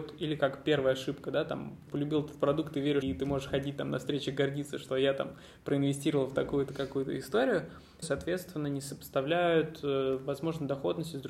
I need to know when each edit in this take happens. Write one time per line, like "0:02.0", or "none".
0:01.9
0:03.0
0:08.0